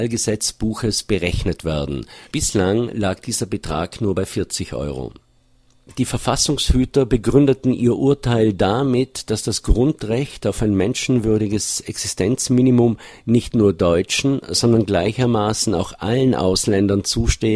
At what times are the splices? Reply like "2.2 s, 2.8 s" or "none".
2.3 s